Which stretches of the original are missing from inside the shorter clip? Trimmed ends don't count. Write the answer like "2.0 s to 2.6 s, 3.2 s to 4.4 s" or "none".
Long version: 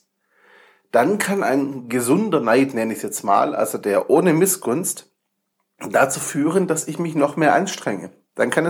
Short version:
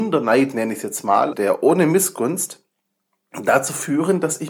3.5 s to 3.8 s